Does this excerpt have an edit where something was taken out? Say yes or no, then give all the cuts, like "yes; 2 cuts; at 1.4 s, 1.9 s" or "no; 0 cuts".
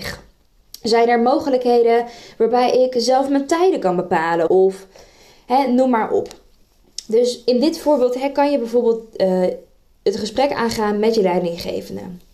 yes; 1 cut; at 4.5 s